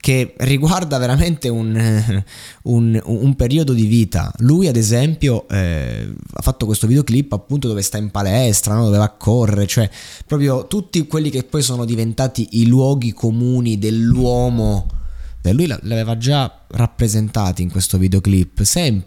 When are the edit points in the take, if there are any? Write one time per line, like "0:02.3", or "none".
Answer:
0:15.4